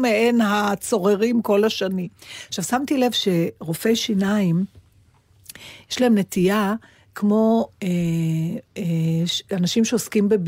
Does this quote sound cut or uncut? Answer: uncut